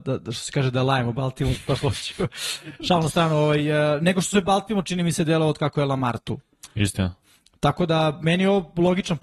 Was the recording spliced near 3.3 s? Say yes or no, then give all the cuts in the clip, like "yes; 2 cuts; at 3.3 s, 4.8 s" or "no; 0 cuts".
no; 0 cuts